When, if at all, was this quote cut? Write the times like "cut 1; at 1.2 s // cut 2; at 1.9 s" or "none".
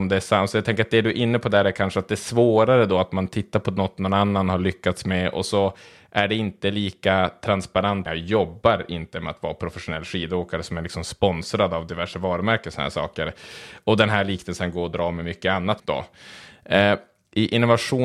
cut 1; at 8.1 s // cut 2; at 15.8 s